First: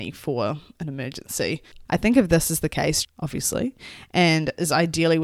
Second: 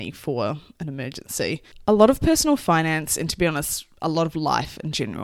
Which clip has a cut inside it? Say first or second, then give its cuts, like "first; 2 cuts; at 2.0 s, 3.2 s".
first; 2 cuts; at 1.9 s, 3.0 s